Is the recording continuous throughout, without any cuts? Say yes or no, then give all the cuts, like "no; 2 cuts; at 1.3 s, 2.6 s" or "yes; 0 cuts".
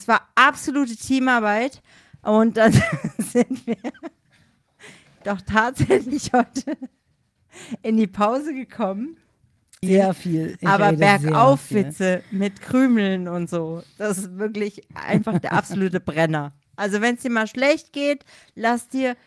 no; 1 cut; at 9.8 s